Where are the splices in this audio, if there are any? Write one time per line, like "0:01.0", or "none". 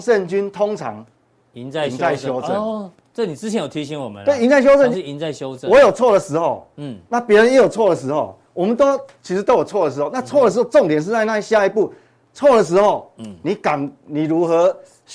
0:04.9